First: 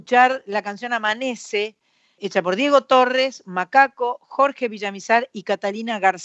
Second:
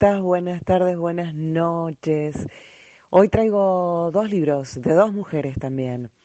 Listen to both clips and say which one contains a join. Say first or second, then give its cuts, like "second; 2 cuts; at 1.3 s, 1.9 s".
first; 1 cut; at 2.2 s